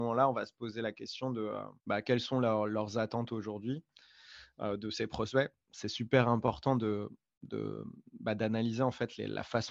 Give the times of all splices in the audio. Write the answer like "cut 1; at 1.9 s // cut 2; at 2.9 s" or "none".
cut 1; at 1.8 s